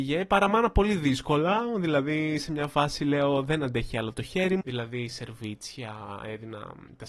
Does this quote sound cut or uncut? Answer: cut